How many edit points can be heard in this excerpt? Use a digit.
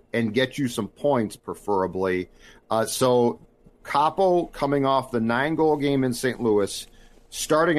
0